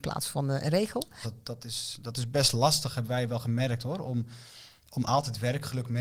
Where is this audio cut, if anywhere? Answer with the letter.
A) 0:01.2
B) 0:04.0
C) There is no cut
A